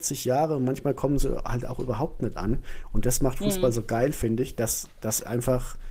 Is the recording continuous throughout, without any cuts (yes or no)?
yes